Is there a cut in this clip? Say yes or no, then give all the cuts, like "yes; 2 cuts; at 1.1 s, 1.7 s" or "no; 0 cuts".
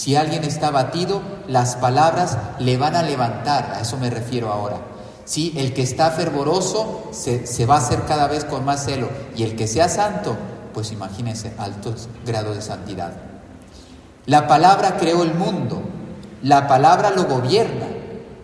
no; 0 cuts